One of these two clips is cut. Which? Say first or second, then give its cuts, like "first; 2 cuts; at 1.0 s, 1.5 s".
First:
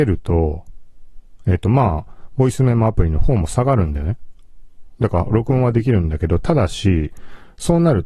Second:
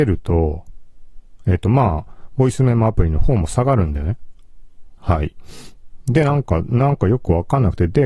second; 1 cut; at 5.0 s